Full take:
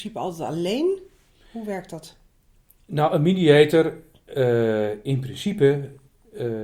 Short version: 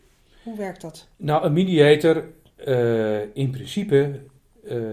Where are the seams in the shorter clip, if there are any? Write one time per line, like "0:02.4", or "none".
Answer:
0:01.1